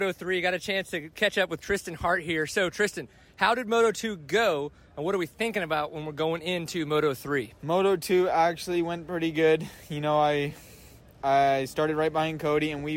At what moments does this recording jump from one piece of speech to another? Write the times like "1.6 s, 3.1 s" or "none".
7.6 s